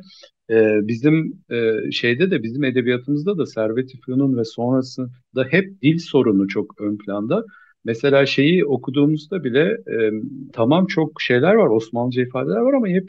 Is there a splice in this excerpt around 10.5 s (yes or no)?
yes